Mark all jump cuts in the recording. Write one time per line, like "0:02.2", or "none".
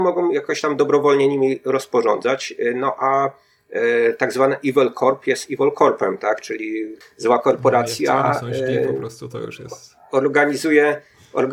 0:07.0